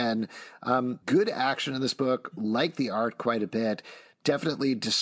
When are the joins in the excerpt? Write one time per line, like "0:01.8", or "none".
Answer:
0:01.0